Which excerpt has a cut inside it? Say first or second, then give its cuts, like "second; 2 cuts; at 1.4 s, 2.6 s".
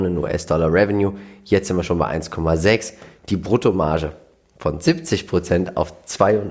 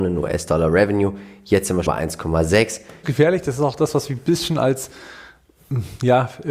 second; 2 cuts; at 1.9 s, 3.0 s